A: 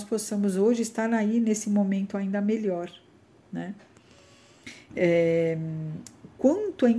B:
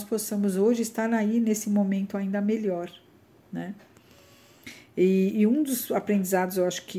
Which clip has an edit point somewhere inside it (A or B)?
A